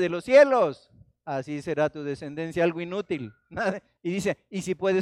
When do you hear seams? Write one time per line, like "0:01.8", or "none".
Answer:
0:04.0